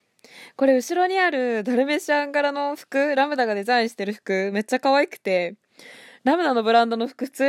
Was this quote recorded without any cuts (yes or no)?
yes